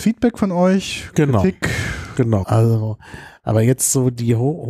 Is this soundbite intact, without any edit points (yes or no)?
no